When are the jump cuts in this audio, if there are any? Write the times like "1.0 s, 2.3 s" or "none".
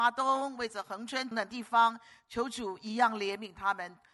1.3 s